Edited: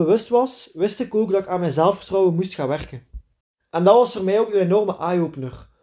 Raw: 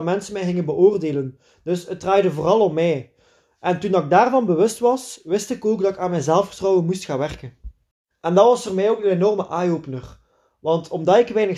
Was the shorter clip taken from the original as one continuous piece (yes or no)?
yes